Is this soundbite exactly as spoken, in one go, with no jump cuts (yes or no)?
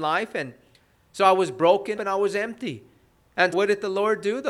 no